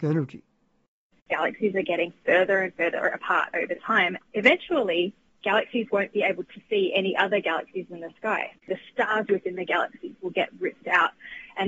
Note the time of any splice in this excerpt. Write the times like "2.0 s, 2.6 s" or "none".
8.6 s